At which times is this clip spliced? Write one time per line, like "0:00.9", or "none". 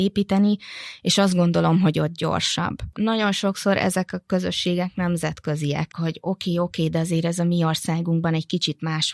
0:02.9
0:05.9